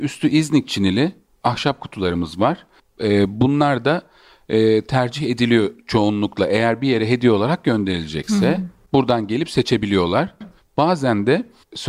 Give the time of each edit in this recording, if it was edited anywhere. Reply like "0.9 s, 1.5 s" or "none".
10.4 s